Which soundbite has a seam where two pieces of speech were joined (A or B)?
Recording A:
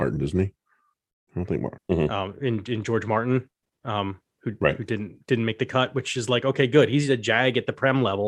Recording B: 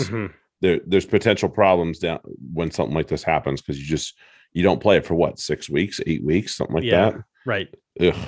A